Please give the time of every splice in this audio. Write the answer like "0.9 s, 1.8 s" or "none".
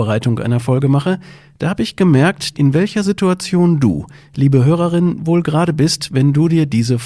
2.5 s, 5.2 s